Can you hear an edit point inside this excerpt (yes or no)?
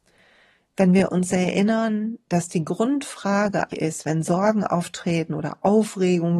yes